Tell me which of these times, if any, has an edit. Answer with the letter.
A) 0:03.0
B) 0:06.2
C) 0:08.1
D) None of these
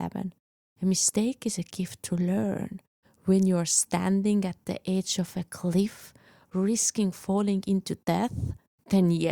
A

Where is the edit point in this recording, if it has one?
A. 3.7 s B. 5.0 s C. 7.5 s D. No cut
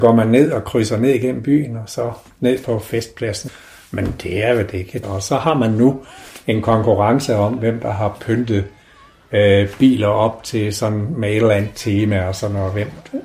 B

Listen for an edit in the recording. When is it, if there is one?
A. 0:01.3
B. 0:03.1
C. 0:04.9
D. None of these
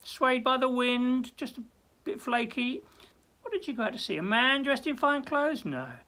D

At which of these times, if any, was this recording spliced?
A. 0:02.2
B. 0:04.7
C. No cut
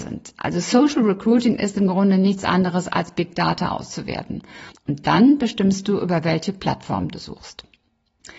B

